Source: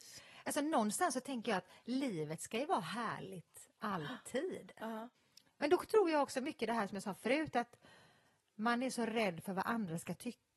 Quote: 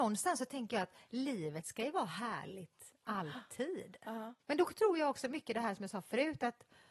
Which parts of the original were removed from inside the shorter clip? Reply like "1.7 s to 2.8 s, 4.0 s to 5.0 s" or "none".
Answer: 5.2 s to 5.5 s